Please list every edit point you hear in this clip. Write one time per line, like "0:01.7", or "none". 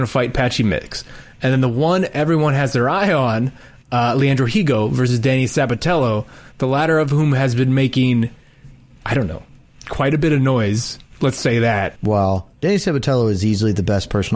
0:12.0